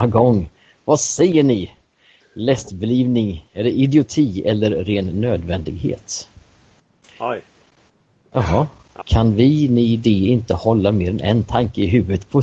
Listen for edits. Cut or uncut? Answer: cut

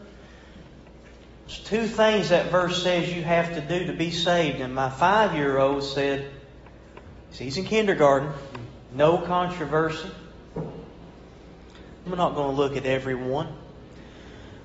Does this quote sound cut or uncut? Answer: cut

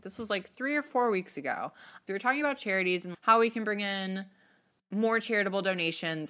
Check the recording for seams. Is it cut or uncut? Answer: cut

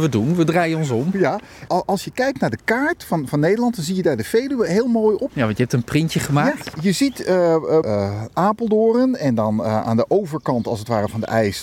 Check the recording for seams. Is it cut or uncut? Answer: cut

